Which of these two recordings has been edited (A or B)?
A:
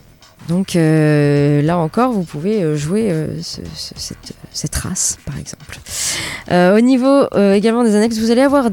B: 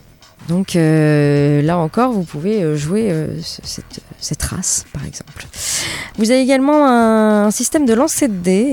B